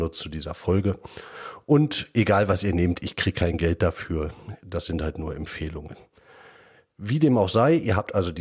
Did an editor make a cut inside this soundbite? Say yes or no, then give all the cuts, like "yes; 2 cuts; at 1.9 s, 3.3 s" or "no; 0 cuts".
no; 0 cuts